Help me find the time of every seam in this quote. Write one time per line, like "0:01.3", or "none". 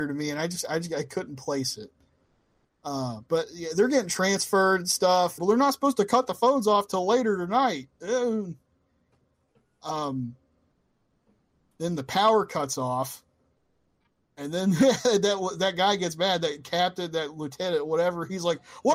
0:03.3
0:05.4